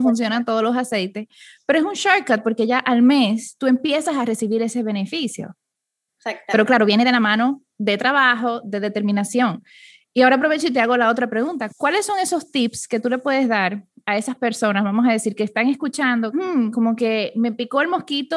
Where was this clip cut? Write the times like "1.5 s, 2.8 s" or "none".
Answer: 11.7 s, 16.3 s